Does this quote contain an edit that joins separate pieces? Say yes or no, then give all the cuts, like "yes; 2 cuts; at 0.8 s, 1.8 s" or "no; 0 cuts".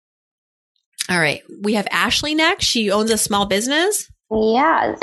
no; 0 cuts